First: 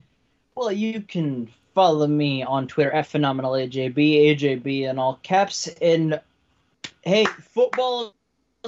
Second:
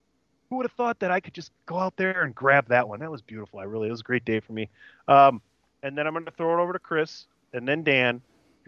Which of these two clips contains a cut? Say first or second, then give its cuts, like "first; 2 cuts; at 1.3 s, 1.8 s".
second; 1 cut; at 5.8 s